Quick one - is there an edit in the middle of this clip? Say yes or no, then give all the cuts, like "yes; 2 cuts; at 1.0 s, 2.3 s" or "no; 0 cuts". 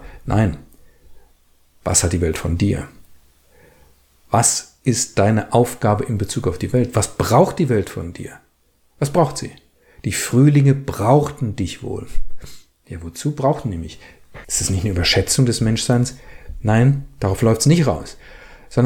yes; 1 cut; at 14.4 s